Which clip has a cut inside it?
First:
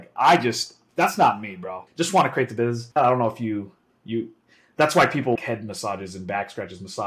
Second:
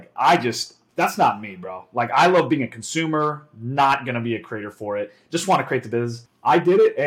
first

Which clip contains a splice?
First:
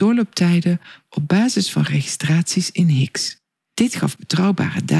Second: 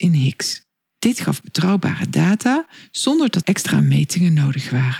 second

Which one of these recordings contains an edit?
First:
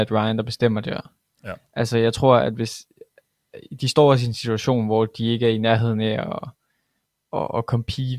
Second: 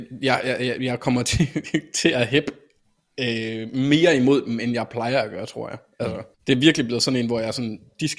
second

